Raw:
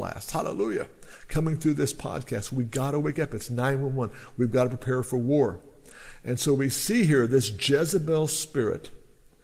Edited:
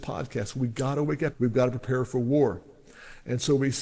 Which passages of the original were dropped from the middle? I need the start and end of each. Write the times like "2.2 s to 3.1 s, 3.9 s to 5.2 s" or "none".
3.3 s to 4.3 s